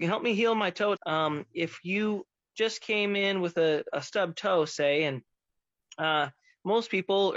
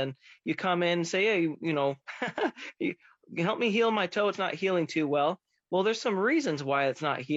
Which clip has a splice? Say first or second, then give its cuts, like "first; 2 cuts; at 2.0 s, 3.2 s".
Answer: first; 2 cuts; at 1.0 s, 3.9 s